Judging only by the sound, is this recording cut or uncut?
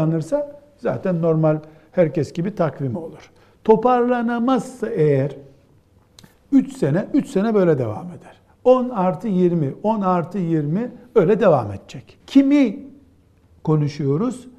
cut